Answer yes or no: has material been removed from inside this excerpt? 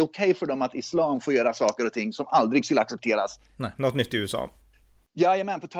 yes